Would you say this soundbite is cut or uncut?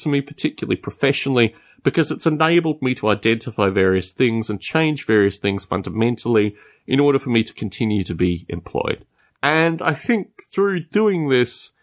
uncut